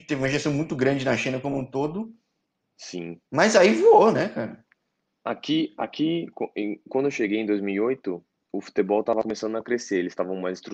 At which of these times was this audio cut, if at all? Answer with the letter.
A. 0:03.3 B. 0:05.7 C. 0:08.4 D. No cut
D